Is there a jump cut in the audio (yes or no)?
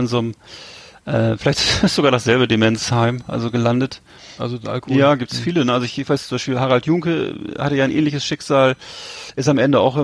yes